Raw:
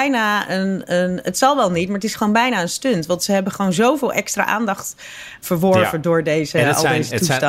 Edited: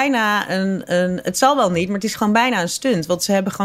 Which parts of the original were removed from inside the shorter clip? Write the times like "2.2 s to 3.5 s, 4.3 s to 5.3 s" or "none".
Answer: none